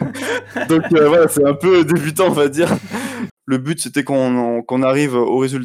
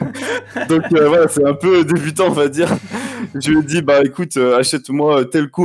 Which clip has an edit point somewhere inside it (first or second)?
first